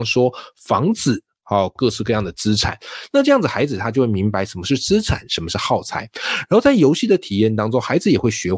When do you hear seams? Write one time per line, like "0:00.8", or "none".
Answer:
0:01.8